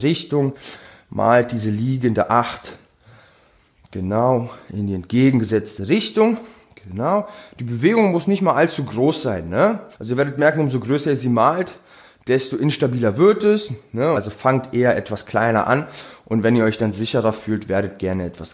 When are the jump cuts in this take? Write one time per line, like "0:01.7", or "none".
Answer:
0:09.9
0:14.1